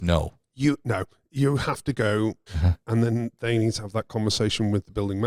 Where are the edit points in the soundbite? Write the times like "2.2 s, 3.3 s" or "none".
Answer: 2.5 s